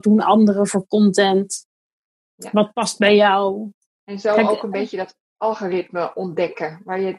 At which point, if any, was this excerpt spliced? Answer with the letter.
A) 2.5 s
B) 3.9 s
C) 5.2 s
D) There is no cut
B